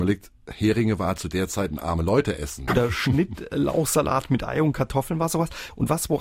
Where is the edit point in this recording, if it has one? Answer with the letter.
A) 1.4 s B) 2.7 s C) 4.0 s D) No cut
B